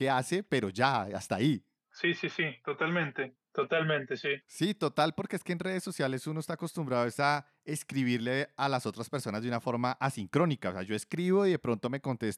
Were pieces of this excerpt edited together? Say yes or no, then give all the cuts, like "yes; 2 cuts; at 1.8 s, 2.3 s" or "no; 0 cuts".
yes; 2 cuts; at 3.4 s, 4.4 s